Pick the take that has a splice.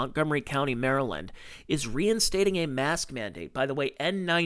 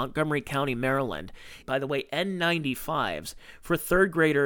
second; 1 cut; at 1.6 s

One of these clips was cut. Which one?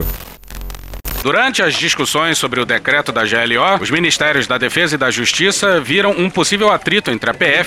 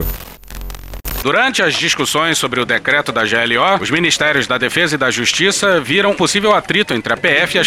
second; 1 cut; at 6.1 s

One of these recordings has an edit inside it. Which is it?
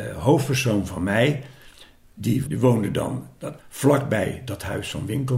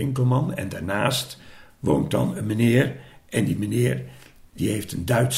first; 2 cuts; at 2.4 s, 3.6 s

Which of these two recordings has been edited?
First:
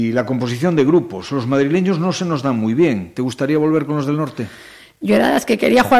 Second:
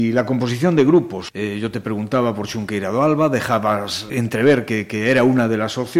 second; 2 cuts; at 1.3 s, 4.1 s

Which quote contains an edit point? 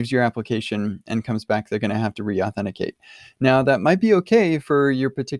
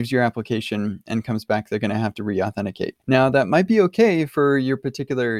second; 1 cut; at 3.0 s

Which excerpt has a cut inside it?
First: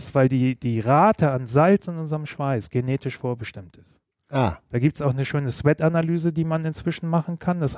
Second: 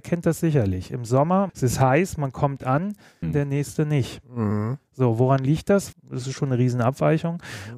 second; 3 cuts; at 1.5 s, 3.2 s, 5.9 s

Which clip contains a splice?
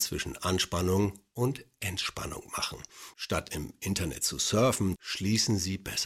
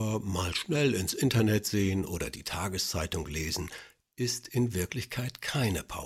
first; 2 cuts; at 3.1 s, 5.0 s

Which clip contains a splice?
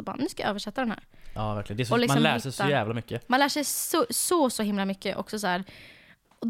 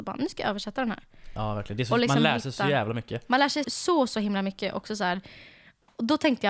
second; 1 cut; at 3.6 s

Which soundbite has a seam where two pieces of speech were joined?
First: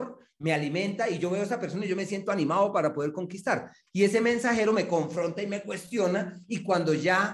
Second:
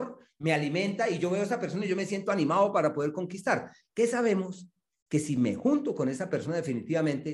first; 1 cut; at 3.9 s

